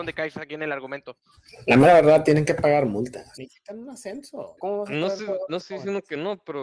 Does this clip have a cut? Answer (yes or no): yes